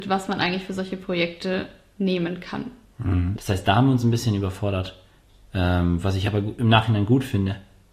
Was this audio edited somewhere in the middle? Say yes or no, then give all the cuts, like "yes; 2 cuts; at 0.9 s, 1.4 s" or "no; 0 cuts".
yes; 1 cut; at 3.3 s